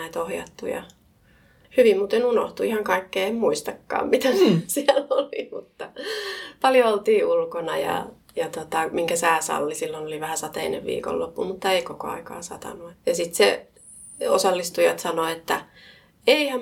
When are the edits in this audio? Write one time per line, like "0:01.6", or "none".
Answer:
0:12.9

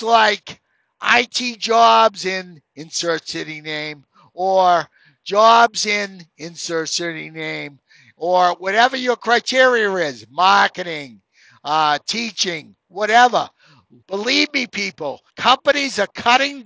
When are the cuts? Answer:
0:14.0
0:15.3

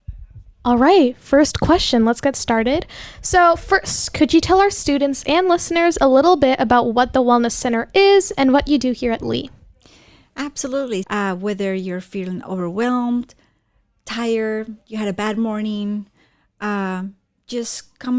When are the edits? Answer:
0:11.0

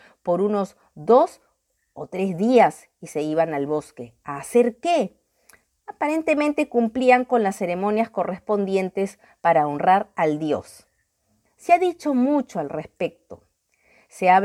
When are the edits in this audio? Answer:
none

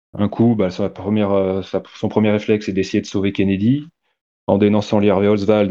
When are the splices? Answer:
none

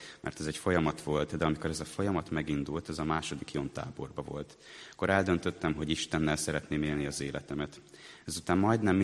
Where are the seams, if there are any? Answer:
none

